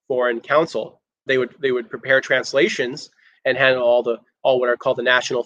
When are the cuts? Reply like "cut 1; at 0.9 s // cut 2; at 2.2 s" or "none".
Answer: cut 1; at 1.3 s // cut 2; at 3.4 s